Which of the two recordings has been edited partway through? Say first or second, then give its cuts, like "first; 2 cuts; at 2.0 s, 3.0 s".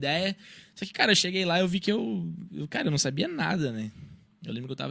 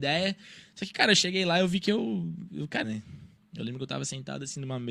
second; 1 cut; at 2.8 s